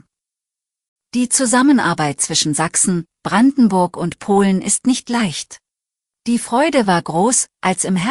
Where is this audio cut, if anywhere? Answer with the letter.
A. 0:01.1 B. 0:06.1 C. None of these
B